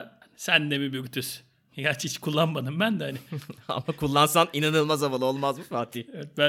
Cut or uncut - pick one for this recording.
uncut